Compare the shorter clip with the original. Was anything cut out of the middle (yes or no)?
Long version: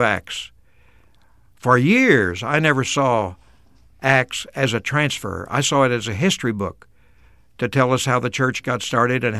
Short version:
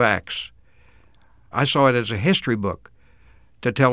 yes